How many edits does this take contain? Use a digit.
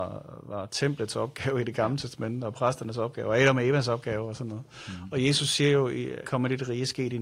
1